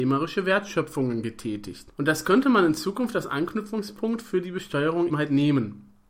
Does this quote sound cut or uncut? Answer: cut